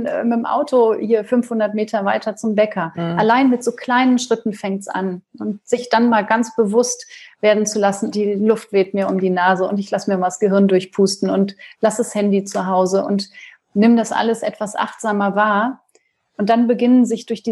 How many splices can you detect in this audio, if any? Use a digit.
1